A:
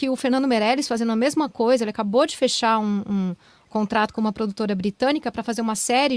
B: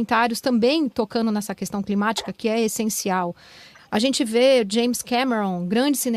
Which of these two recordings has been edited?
B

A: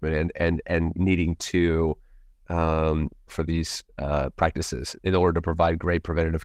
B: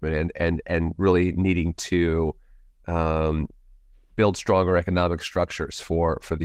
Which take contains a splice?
A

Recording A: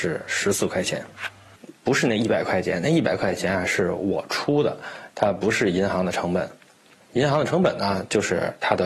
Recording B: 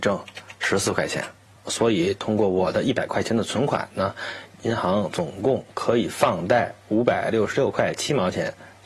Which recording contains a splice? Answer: A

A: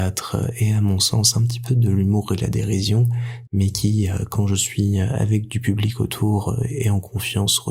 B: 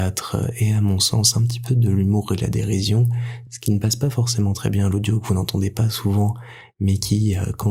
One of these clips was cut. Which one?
A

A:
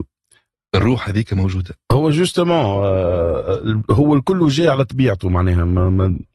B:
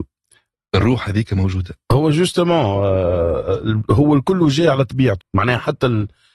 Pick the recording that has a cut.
B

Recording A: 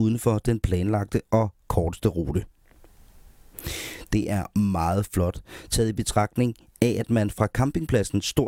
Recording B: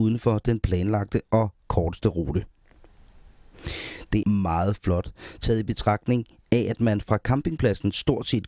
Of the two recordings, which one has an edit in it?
B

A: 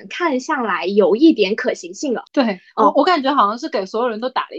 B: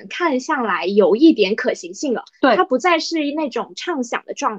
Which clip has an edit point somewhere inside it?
A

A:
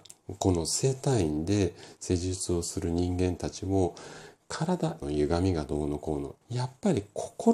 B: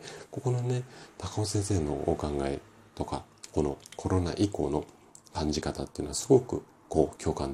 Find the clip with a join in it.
A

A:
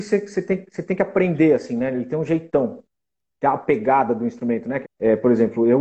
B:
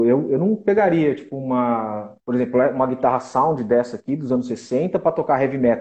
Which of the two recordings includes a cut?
A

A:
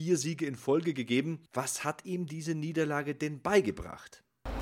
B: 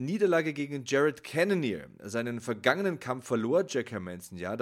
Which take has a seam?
A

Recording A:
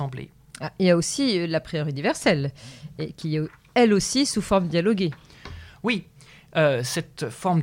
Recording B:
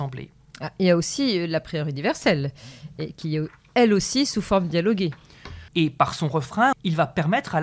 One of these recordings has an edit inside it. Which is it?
B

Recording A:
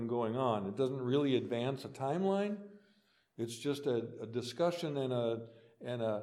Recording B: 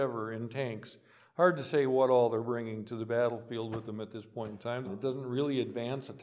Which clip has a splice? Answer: B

